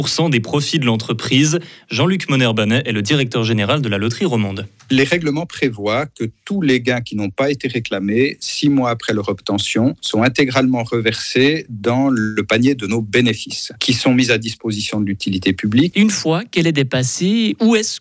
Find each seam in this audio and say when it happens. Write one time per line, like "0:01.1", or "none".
0:15.9